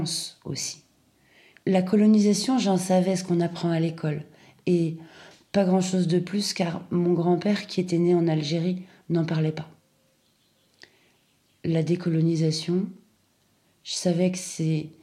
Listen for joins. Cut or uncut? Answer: cut